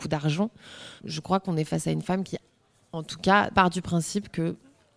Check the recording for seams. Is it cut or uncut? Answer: cut